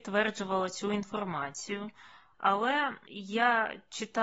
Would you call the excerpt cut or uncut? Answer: cut